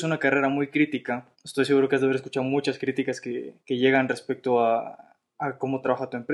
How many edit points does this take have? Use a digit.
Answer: 2